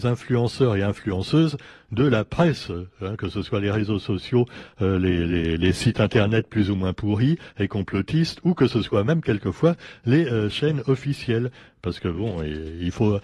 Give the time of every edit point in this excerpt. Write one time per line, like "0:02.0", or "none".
none

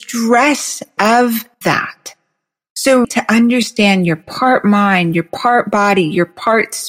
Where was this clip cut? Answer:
0:01.5
0:03.0

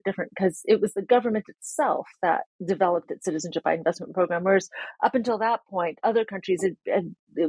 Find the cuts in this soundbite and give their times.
0:02.5

